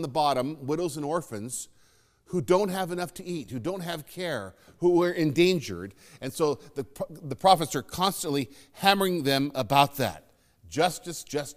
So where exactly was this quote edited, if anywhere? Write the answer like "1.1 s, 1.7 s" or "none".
none